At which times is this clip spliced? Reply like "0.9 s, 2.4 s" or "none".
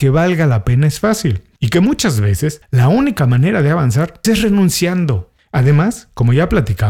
4.2 s